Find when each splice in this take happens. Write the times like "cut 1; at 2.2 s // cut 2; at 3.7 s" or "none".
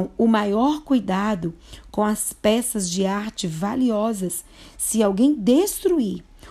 none